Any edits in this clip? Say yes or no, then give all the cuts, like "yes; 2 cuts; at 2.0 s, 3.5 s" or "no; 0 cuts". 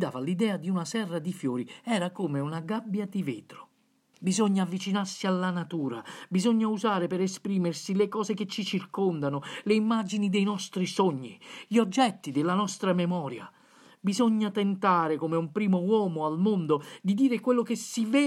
yes; 1 cut; at 4.1 s